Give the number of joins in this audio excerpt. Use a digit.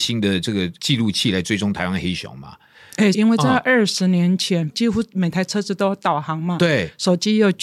2